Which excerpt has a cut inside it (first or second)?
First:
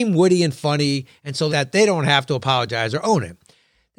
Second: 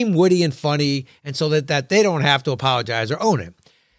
first